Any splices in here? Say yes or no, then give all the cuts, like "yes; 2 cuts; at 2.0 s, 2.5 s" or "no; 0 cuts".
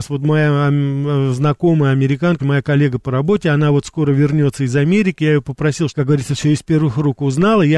yes; 2 cuts; at 2.4 s, 5.9 s